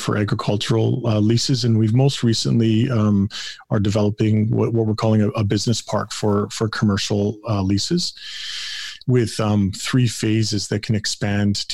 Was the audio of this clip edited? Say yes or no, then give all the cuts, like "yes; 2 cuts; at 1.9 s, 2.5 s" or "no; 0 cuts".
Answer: no; 0 cuts